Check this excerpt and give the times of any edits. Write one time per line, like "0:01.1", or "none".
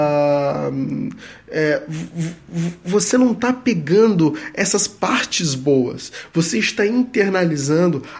none

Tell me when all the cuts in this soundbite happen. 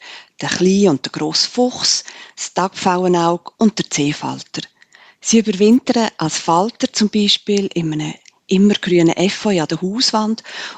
none

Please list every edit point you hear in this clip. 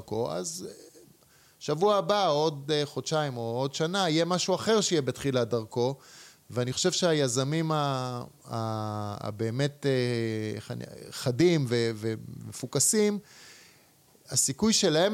none

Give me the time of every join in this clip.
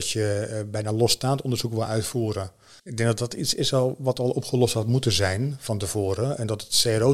0:02.8

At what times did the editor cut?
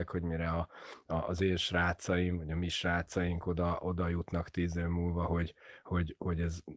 none

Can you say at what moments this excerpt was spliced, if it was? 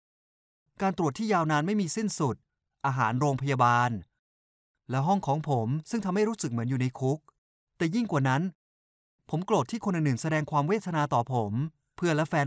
none

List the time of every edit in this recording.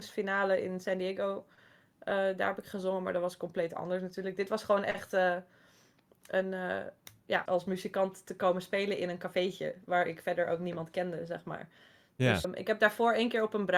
0:07.5
0:12.4

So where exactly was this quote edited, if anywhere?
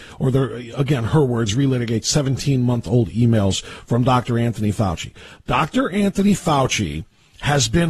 none

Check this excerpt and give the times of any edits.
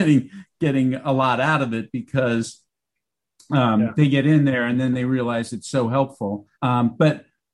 0:06.5

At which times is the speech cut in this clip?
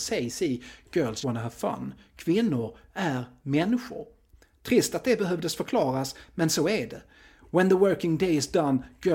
0:01.2

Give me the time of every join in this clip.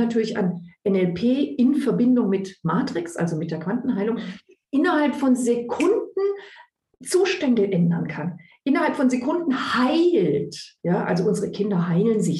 none

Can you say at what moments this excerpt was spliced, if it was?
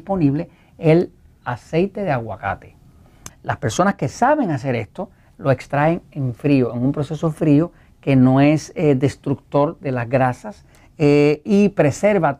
0:03.3

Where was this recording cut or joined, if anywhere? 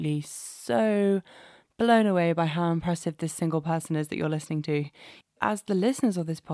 0:05.4

